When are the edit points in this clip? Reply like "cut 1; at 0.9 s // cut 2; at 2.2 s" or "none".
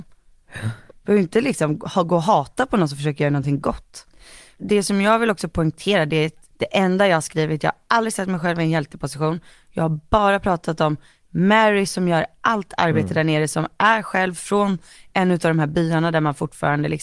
cut 1; at 0.9 s // cut 2; at 6.5 s